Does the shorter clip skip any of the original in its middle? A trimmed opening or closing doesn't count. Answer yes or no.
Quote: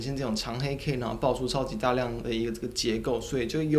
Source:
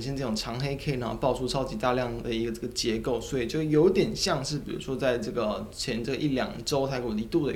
no